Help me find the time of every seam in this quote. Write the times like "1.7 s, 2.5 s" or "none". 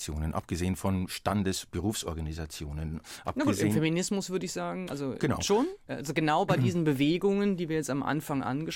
none